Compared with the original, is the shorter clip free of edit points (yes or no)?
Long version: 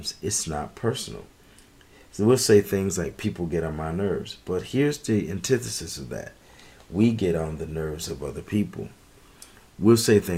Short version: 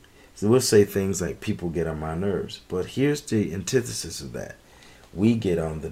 yes